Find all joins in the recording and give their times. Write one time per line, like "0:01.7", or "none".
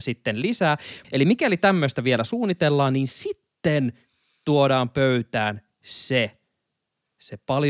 0:01.0